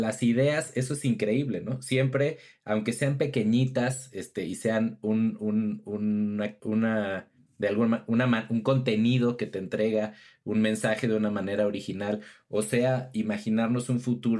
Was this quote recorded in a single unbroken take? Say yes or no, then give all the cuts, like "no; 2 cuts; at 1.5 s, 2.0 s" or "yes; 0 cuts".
no; 1 cut; at 6.6 s